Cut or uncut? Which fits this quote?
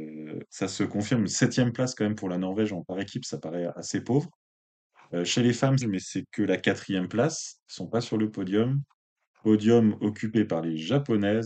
cut